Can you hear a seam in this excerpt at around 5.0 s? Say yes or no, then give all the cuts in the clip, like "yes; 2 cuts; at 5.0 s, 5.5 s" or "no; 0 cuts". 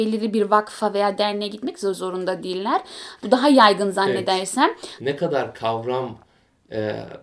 yes; 2 cuts; at 3.2 s, 5.0 s